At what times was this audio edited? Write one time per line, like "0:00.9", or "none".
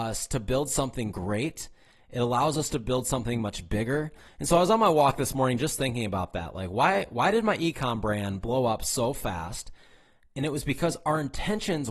0:04.3